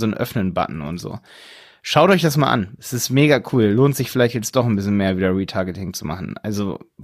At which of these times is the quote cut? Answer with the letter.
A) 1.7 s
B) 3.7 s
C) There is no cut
C